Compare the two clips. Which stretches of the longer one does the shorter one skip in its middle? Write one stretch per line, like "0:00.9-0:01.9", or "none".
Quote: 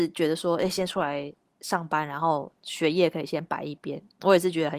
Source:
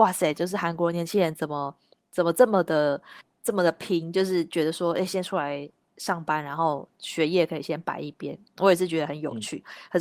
none